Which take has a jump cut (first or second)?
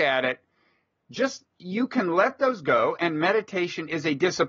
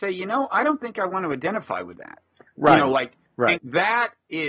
second